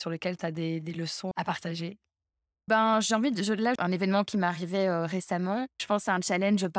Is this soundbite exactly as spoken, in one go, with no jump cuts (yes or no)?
no